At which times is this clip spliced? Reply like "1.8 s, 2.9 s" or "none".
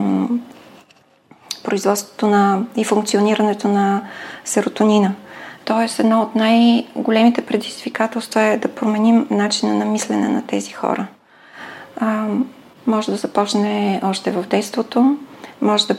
5.6 s, 12.7 s

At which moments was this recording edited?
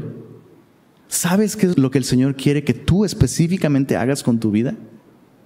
1.7 s

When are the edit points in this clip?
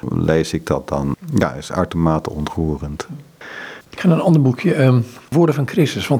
3.9 s

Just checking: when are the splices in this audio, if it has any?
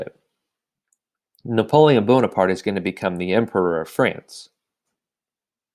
none

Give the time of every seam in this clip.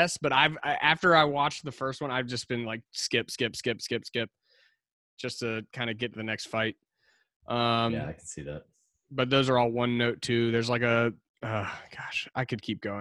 none

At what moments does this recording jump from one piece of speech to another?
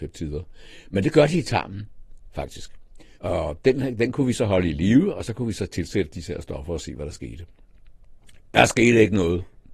3.1 s

